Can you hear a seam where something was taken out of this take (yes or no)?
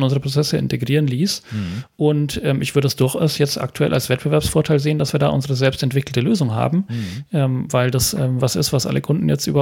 no